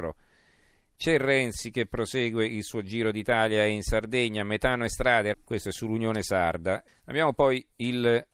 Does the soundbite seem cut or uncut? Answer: cut